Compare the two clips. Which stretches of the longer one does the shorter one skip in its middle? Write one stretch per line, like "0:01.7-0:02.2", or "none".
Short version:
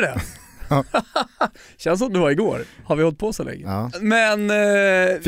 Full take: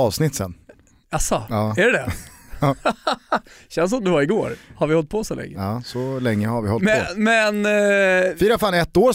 0:05.8-0:07.1